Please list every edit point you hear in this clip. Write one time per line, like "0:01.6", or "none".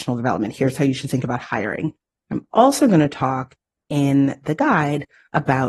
0:02.1